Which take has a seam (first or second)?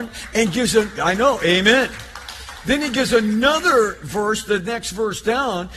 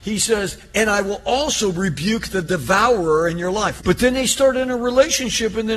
second